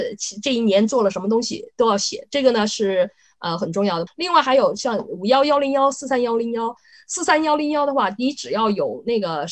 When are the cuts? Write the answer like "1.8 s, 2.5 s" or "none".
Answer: 4.1 s, 6.9 s